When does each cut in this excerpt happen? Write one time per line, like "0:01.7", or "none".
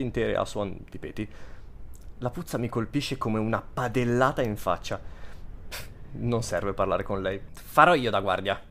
0:05.7
0:07.5